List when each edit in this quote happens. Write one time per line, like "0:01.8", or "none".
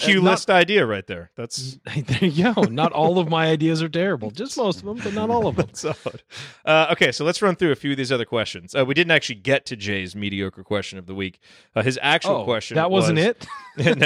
none

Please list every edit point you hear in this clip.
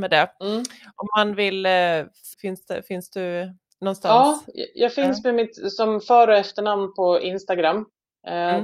0:02.3

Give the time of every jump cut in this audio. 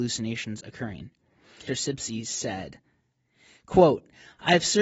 0:01.7

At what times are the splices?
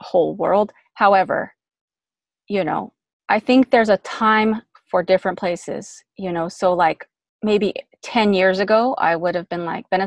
none

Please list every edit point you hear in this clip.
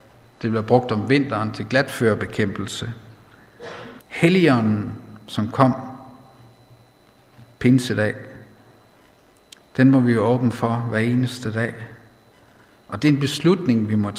0:04.0
0:09.6

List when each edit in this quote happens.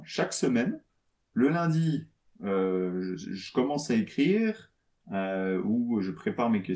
none

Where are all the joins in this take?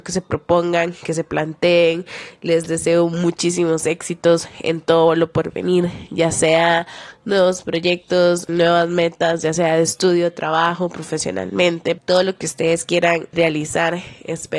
0:08.5
0:12.0
0:13.3

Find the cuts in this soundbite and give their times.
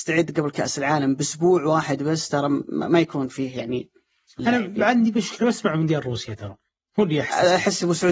0:04.4

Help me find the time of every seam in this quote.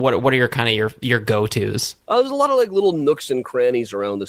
0:02.0

